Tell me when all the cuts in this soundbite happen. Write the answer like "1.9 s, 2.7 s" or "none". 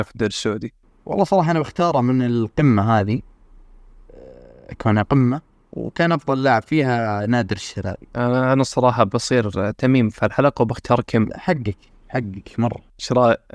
none